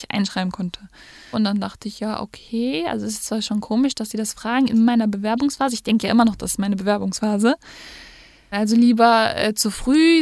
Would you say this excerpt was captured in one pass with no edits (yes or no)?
no